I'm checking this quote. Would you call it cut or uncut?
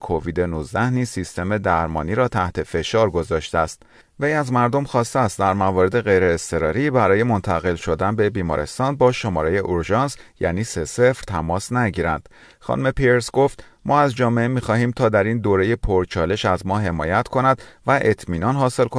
uncut